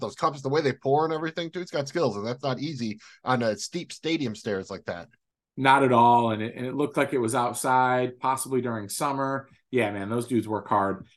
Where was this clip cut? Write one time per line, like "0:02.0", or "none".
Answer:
none